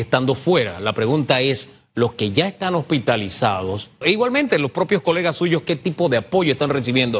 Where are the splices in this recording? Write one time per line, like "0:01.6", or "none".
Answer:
0:04.0